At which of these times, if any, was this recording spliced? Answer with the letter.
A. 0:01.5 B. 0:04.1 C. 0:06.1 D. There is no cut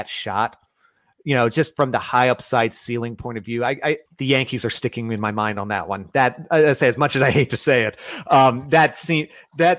B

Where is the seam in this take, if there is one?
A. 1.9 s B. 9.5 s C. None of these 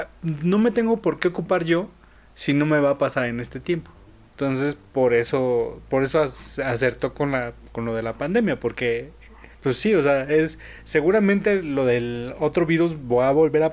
B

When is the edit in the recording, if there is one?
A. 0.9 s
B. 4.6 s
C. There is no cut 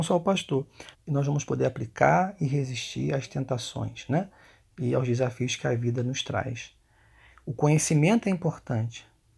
A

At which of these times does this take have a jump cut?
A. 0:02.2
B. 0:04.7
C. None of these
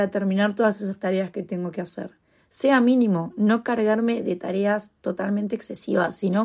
C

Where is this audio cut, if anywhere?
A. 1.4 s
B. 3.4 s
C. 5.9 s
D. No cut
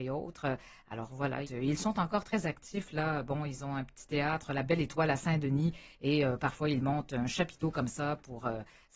A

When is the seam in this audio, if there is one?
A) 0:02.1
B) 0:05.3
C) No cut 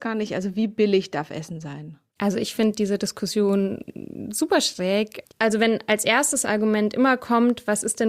B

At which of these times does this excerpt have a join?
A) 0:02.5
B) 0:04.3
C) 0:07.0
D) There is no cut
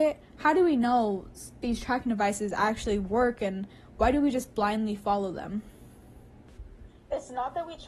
D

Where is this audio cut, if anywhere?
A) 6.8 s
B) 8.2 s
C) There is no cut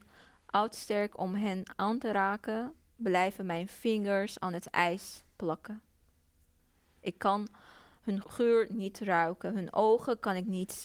B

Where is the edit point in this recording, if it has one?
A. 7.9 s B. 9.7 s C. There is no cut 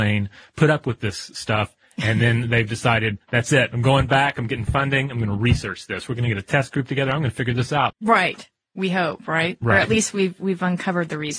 A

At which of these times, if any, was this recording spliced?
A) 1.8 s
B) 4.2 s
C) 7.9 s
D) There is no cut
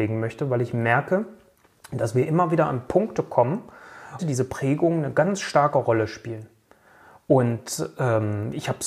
B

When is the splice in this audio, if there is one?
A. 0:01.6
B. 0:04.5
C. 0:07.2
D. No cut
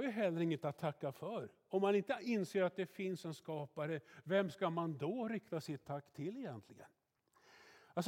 D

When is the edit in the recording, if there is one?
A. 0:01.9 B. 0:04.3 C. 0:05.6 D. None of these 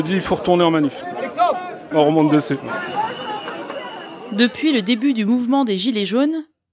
A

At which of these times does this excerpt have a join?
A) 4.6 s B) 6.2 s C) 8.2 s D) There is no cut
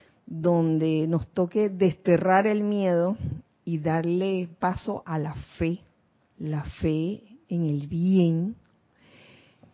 B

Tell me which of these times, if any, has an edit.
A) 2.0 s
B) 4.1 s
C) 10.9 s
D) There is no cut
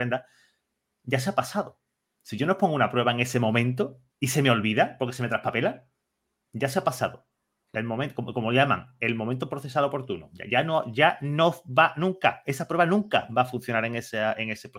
B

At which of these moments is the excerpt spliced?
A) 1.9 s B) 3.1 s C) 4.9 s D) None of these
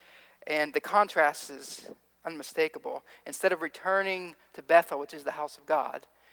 D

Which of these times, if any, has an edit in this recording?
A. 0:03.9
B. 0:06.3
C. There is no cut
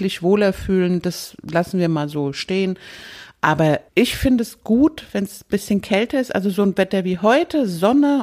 A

